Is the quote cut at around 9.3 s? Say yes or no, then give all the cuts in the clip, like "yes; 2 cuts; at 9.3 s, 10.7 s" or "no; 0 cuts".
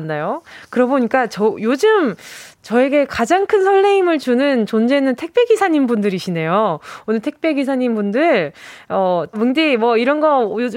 yes; 1 cut; at 9.3 s